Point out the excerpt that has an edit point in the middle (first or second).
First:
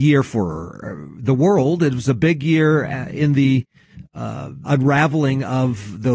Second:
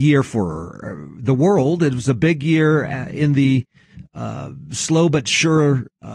first